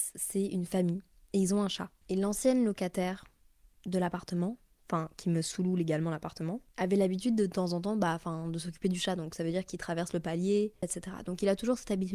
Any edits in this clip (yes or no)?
yes